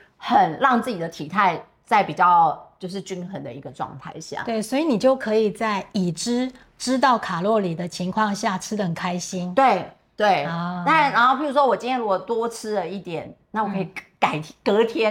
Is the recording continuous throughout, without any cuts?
yes; 0 cuts

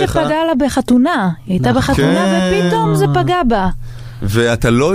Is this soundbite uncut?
yes; 0 cuts

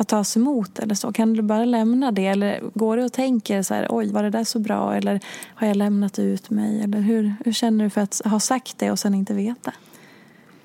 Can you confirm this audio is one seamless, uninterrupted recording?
no; 1 cut; at 4.1 s

